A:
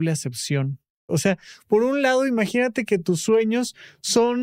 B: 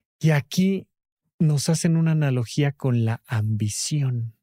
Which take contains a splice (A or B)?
A